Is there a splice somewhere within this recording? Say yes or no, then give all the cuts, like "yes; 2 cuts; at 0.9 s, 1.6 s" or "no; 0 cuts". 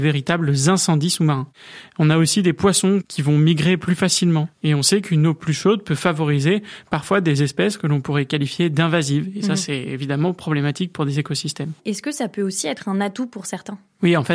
yes; 1 cut; at 11.8 s